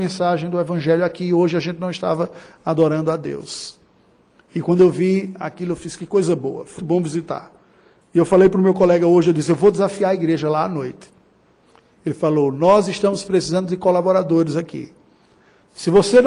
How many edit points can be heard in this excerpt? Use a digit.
1